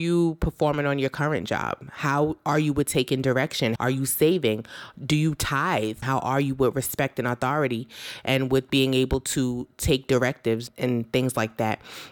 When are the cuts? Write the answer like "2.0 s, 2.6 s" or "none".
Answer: 3.8 s, 6.0 s, 10.7 s